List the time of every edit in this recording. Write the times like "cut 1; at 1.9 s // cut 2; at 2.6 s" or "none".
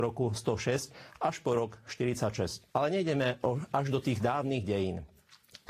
cut 1; at 2.7 s